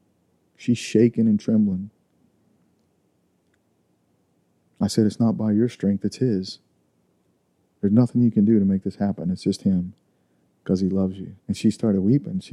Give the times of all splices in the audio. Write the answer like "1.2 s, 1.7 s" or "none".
11.4 s